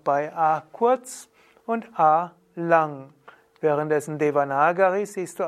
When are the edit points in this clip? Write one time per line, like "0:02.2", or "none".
none